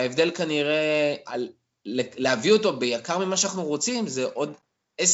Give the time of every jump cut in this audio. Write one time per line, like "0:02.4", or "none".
0:01.3